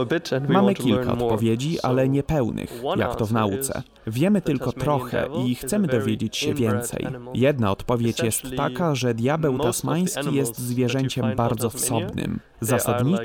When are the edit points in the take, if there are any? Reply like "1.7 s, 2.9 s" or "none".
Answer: none